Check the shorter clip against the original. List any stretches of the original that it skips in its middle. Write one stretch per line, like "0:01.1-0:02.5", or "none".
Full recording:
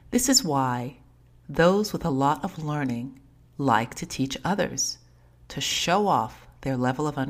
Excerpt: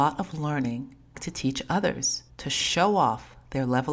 0:03.4-0:03.9
0:05.0-0:05.4